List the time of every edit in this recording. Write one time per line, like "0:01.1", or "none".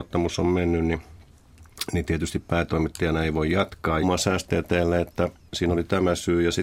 0:04.0